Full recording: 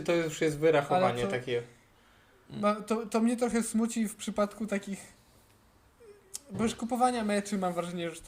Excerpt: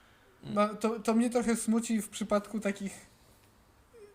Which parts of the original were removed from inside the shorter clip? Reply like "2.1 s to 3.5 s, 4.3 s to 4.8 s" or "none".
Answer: none